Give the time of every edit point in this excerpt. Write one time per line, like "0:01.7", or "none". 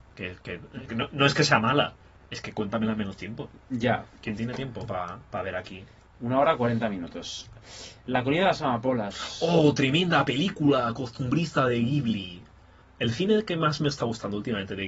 none